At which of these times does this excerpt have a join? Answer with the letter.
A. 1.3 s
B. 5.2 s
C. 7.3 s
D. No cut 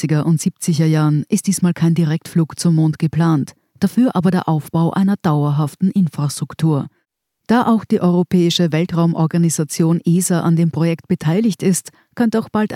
C